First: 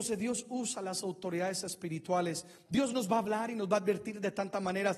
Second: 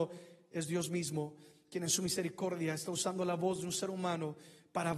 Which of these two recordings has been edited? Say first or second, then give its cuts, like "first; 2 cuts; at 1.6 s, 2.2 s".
first; 1 cut; at 2.7 s